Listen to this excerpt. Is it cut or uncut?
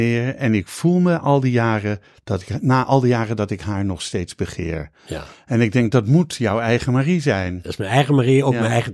uncut